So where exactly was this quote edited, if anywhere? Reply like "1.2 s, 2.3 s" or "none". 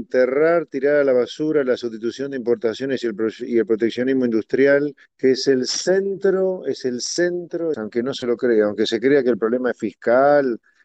5.0 s, 7.7 s